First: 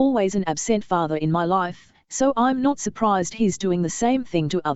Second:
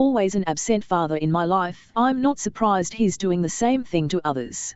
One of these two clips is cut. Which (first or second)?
second